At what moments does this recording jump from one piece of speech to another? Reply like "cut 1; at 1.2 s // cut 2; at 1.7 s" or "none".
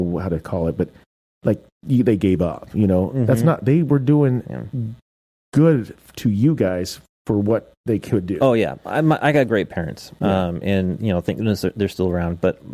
none